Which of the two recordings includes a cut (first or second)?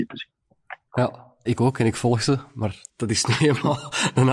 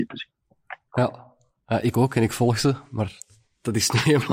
first